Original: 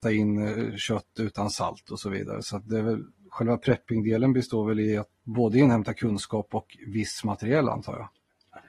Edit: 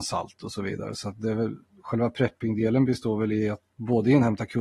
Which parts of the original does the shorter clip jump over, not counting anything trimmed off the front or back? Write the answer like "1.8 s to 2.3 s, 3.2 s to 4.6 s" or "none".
none

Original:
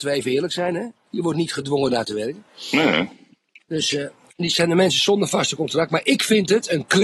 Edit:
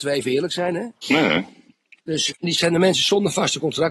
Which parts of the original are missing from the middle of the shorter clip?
1.0 s to 2.6 s, 3.9 s to 4.2 s

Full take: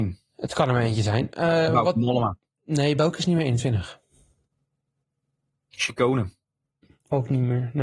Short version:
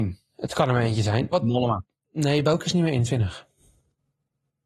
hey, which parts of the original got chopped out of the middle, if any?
1.3 s to 1.8 s

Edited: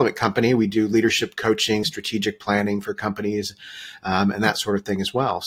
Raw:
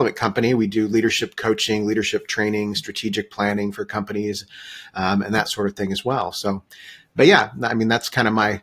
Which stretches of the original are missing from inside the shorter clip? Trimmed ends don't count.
1.8 s to 2.7 s

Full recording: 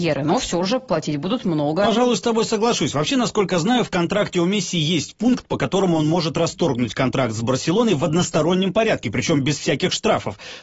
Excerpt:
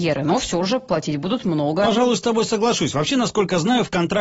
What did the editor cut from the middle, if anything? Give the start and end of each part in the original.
none

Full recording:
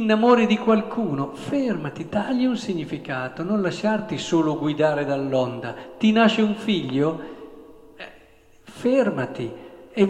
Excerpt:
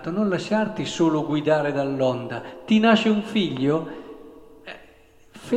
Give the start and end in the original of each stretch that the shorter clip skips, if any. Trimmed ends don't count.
none

